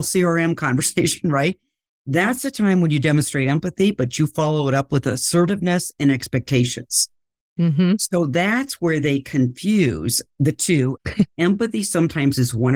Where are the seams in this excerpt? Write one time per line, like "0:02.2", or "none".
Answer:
0:11.0